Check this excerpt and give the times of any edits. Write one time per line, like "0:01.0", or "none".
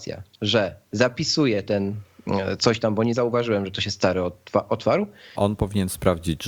0:05.4